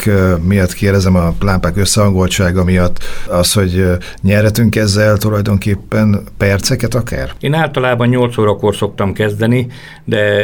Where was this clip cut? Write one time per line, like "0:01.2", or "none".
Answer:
0:07.4